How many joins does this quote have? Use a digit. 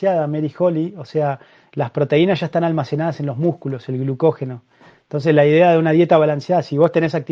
0